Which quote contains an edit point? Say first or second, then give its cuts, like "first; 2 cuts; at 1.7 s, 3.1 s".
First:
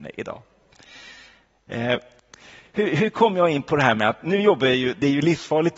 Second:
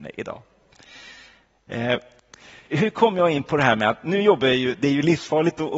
second; 1 cut; at 2.7 s